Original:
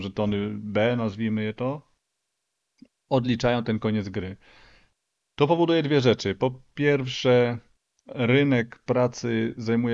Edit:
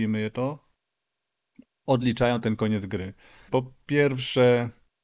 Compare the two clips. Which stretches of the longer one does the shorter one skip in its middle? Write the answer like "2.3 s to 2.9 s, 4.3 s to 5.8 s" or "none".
4.7 s to 6.4 s